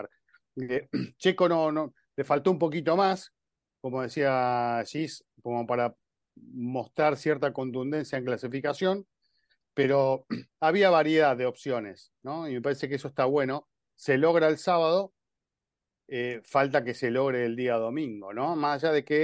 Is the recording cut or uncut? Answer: uncut